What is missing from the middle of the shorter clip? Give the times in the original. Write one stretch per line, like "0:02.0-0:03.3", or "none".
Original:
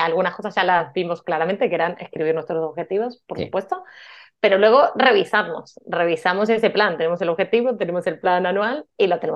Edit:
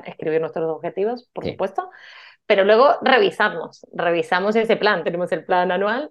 0:07.0-0:07.8